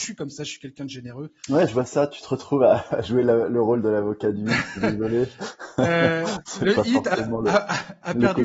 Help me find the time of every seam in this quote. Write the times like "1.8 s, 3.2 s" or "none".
none